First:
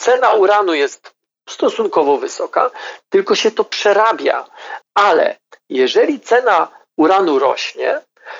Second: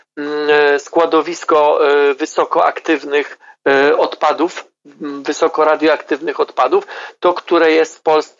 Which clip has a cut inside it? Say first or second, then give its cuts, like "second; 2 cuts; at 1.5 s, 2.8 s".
first; 2 cuts; at 3.0 s, 4.8 s